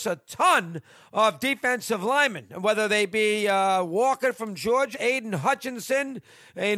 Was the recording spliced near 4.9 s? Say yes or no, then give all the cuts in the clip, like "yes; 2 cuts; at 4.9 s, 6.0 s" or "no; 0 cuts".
yes; 1 cut; at 4.9 s